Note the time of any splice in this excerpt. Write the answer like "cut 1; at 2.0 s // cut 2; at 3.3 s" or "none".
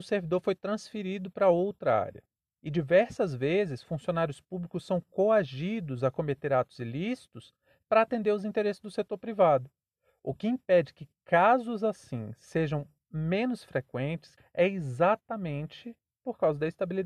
cut 1; at 2.5 s // cut 2; at 14.4 s